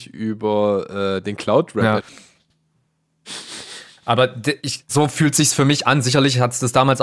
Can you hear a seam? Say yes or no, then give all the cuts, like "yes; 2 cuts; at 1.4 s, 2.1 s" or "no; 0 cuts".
yes; 2 cuts; at 2.0 s, 4.9 s